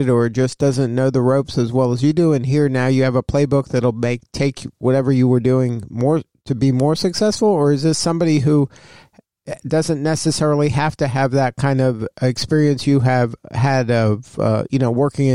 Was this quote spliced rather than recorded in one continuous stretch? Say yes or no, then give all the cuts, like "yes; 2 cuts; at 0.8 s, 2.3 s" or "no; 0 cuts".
no; 0 cuts